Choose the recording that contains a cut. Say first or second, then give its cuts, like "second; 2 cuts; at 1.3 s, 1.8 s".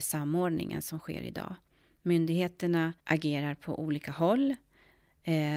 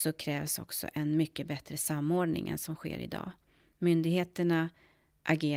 first; 1 cut; at 3.0 s